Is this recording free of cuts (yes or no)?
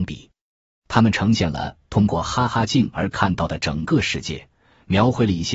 yes